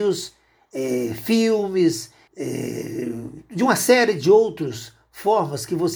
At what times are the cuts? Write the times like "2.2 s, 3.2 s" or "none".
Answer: 2.3 s